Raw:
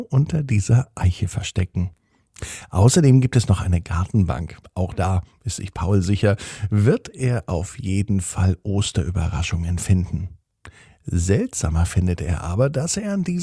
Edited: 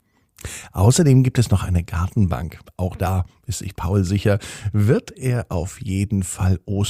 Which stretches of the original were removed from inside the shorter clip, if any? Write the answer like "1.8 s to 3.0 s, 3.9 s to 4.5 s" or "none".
none